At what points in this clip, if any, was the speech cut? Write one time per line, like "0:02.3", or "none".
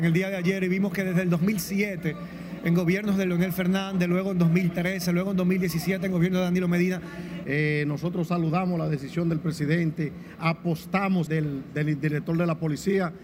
0:07.4
0:11.3